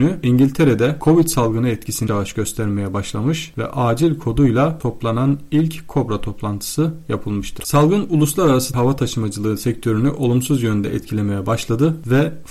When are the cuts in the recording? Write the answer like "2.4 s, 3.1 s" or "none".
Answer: 2.1 s, 7.6 s